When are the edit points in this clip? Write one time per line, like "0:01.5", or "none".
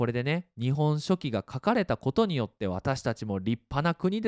none